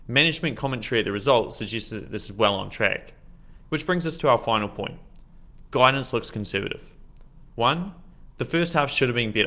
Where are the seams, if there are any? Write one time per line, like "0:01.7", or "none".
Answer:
0:03.6
0:07.5